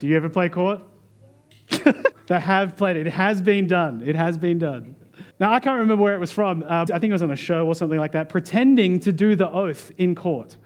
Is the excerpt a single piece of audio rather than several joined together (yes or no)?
no